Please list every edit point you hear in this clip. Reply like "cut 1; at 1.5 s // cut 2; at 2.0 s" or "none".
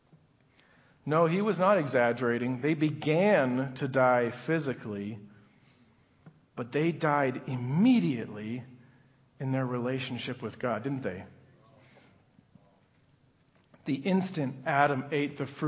none

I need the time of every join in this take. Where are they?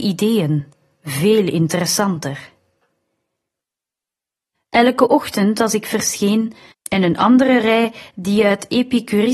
cut 1; at 4.5 s // cut 2; at 6.7 s

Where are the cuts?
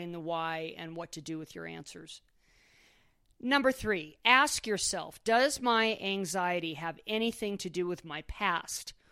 none

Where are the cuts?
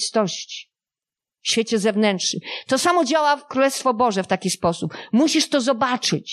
none

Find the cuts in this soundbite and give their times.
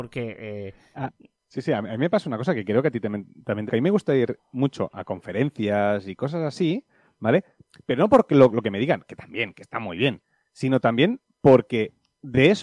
cut 1; at 3.7 s

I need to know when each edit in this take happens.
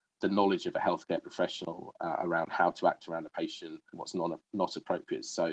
cut 1; at 3.9 s

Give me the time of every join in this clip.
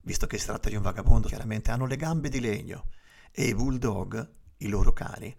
cut 1; at 1.3 s

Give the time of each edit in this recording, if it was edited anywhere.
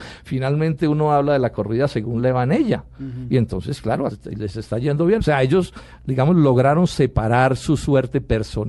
cut 1; at 4.1 s // cut 2; at 5.2 s

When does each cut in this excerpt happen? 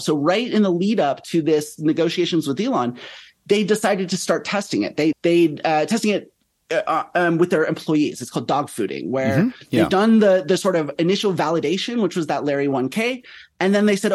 cut 1; at 5.1 s

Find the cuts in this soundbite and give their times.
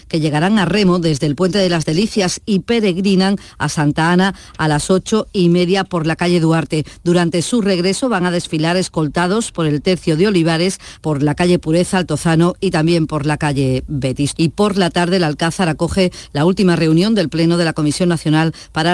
cut 1; at 11.0 s // cut 2; at 14.3 s

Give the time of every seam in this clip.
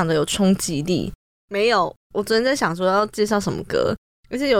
cut 1; at 1.3 s

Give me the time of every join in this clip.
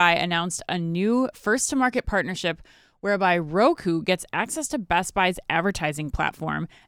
none

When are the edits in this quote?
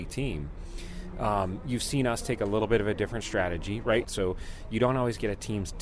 cut 1; at 4.0 s

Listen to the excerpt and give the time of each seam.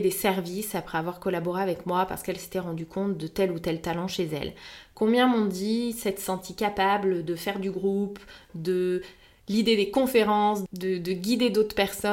cut 1; at 10.7 s

